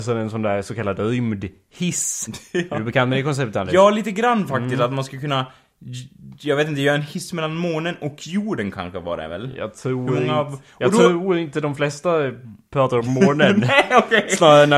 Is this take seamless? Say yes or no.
yes